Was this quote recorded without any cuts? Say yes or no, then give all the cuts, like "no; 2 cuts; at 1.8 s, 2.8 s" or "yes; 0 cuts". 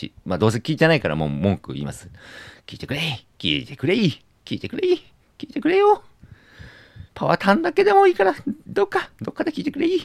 no; 1 cut; at 7.1 s